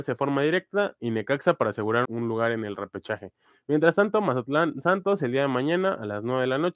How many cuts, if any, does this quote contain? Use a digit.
1